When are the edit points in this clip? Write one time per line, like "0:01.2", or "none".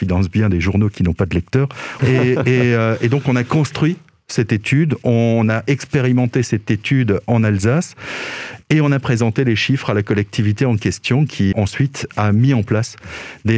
0:02.0
0:11.5

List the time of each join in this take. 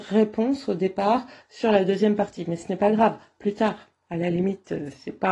0:03.4

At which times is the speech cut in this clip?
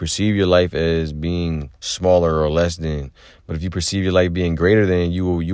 0:01.8

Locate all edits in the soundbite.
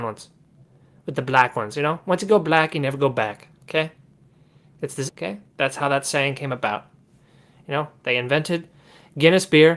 0:05.1

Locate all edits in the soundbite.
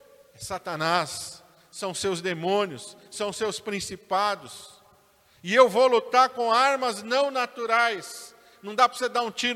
none

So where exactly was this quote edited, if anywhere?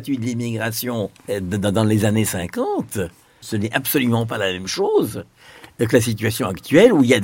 0:01.2
0:03.4

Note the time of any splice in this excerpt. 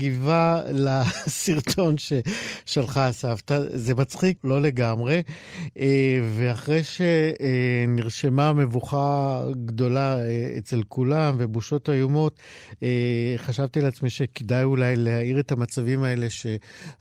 0:04.4

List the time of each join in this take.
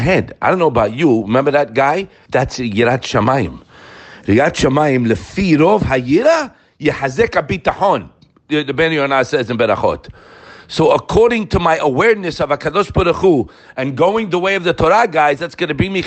0:02.3

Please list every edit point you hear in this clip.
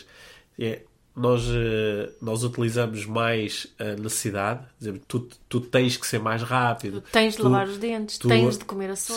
0:05.0

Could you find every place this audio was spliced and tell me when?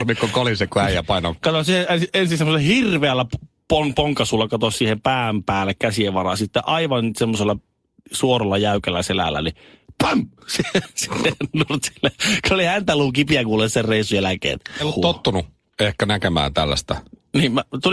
0:14.8

